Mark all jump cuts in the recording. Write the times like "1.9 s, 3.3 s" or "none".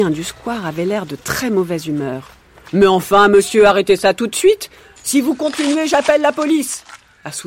5.0 s